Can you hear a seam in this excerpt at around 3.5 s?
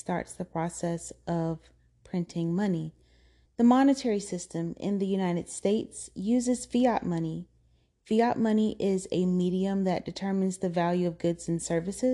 yes; 1 cut; at 3.5 s

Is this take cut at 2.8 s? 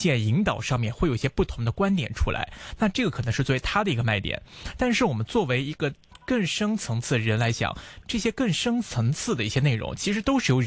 no; 1 cut; at 8.0 s

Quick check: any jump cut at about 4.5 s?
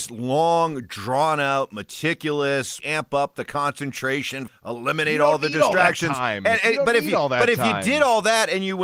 yes; 2 cuts; at 2.8 s, 4.5 s

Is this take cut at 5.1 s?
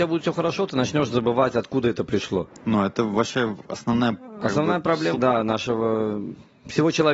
yes; 1 cut; at 5.1 s

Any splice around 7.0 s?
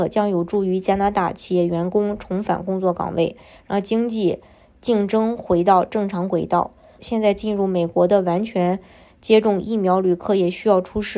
yes; 1 cut; at 7.0 s

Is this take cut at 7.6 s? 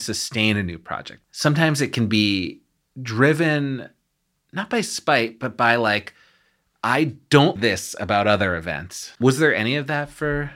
yes; 3 cuts; at 1.2 s, 7.6 s, 9.2 s

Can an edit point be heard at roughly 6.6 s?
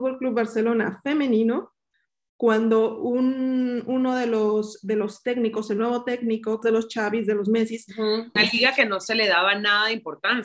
yes; 2 cuts; at 6.6 s, 8.4 s

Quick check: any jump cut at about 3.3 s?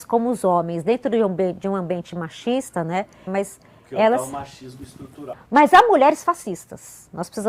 yes; 2 cuts; at 3.3 s, 5.3 s

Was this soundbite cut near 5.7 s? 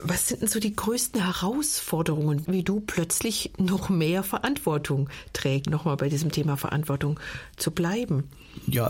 yes; 2 cuts; at 2.5 s, 5.7 s

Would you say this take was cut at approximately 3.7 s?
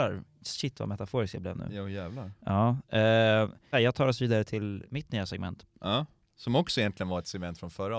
yes; 1 cut; at 3.7 s

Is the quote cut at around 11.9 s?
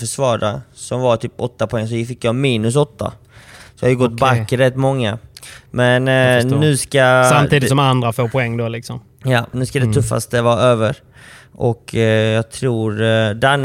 no; 1 cut; at 9.5 s

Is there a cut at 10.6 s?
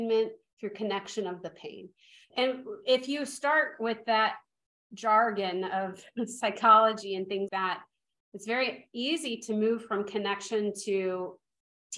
no; 2 cuts; at 2.3 s, 7.5 s

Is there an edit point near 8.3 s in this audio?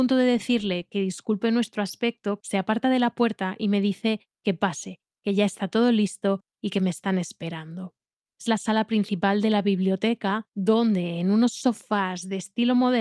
yes; 2 cuts; at 2.4 s, 8.3 s

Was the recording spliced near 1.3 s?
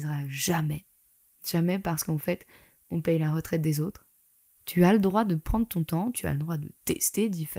no; 2 cuts; at 4.6 s, 6.1 s

